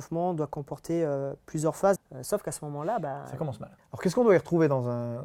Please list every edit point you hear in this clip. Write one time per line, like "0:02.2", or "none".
0:02.0
0:03.8